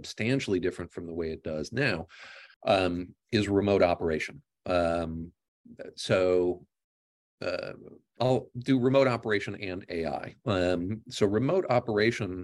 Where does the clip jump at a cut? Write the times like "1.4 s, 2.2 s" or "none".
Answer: 2.5 s, 8.2 s